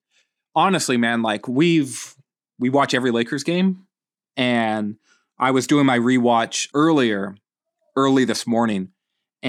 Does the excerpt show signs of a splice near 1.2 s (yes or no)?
no